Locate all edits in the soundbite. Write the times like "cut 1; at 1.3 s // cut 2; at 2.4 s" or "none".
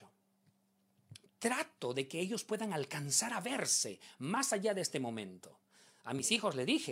cut 1; at 1.3 s